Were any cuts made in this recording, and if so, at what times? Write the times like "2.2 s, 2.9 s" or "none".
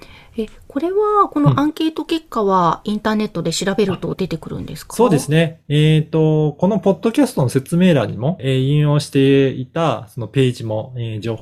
8.4 s